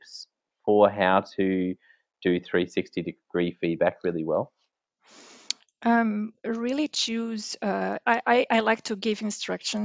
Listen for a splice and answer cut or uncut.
uncut